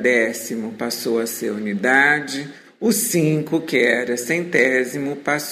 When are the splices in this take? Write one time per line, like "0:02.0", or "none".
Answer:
none